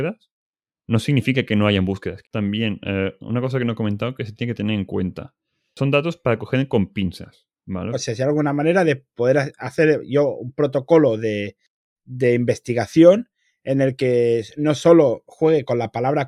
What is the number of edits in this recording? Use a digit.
2